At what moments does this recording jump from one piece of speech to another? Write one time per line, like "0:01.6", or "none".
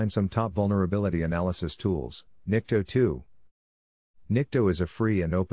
0:02.4

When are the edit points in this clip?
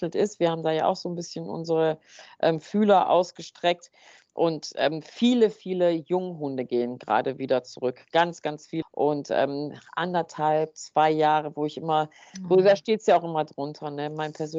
0:08.8

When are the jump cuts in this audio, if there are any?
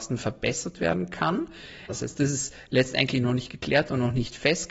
0:01.9

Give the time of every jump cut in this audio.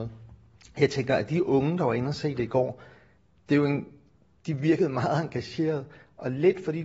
none

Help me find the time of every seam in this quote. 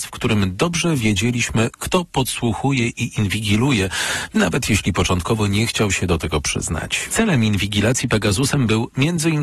0:07.1

